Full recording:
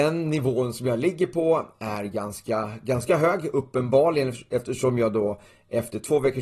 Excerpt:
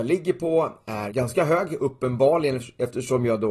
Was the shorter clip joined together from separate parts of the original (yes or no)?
yes